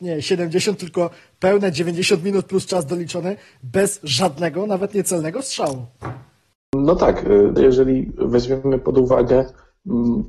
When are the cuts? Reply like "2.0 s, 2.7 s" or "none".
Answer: 7.6 s